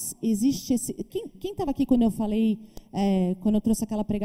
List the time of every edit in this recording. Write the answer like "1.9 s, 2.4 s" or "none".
none